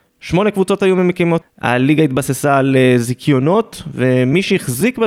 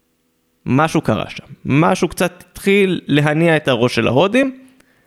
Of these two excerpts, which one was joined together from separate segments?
first; 1 cut; at 1.4 s

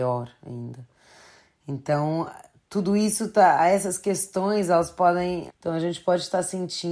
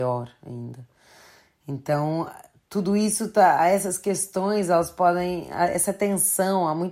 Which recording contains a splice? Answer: first; 1 cut; at 5.5 s

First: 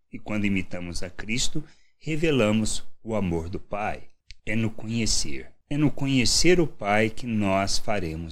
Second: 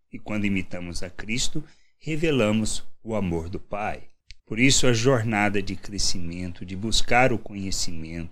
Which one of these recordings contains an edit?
second; 1 cut; at 4.4 s

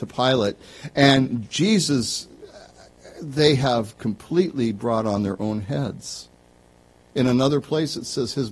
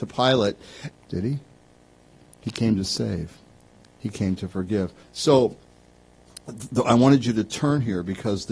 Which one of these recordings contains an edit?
second; 2 cuts; at 0.9 s, 5.0 s

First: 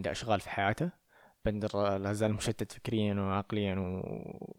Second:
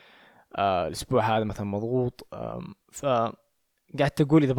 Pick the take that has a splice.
second; 1 cut; at 2.8 s

